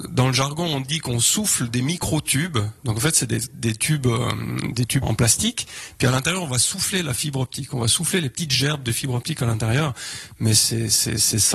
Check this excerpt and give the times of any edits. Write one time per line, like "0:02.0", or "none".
0:05.0